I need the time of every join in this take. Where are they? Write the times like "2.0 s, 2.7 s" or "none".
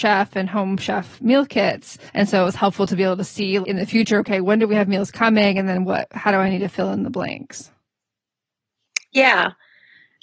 2.1 s, 3.6 s